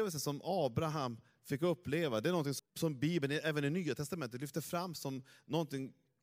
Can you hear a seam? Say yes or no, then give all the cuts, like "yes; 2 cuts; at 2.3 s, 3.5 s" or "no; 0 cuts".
yes; 1 cut; at 2.6 s